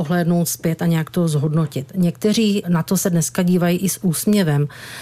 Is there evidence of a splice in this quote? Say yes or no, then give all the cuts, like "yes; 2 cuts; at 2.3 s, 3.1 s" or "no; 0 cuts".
yes; 1 cut; at 2.6 s